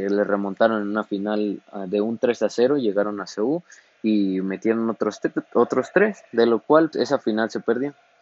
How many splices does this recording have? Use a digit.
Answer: 1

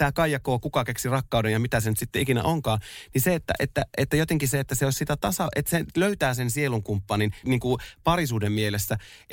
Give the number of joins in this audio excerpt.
1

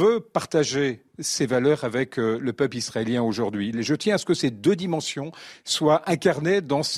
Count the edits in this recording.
1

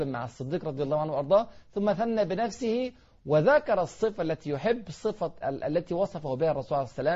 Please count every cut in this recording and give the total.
1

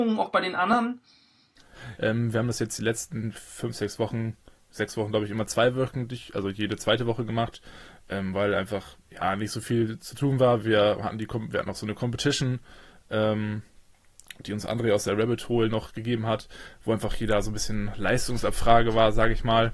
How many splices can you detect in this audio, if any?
1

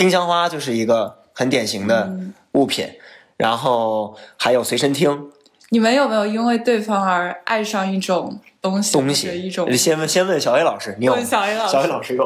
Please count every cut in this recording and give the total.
0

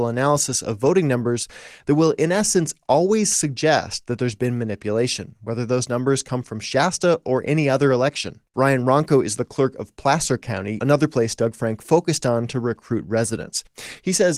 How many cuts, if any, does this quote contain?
2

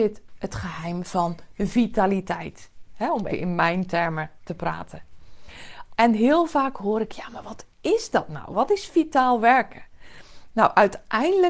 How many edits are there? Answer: 2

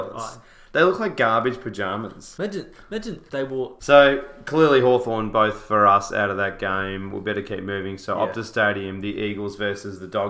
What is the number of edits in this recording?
1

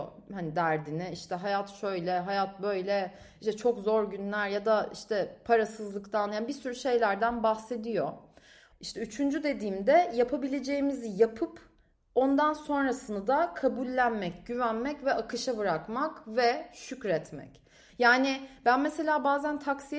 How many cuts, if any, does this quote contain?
2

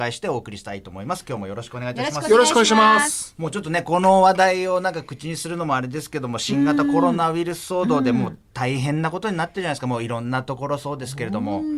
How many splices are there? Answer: 0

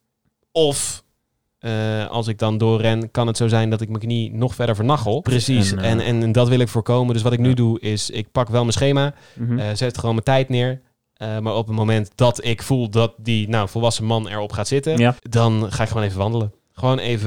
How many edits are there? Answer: 2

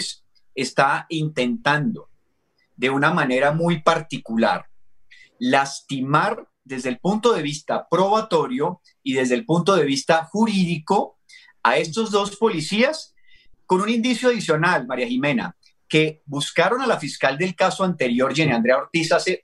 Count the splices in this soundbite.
0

